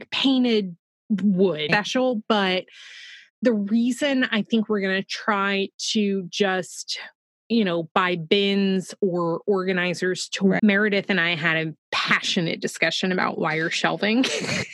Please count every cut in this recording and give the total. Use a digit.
3